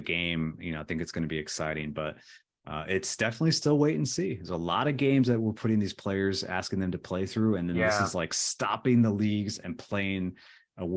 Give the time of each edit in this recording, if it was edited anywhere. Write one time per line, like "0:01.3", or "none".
none